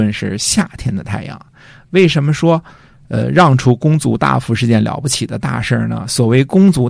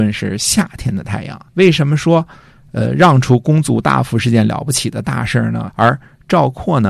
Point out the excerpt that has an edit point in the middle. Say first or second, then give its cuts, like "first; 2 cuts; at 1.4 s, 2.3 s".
second; 2 cuts; at 1.5 s, 5.7 s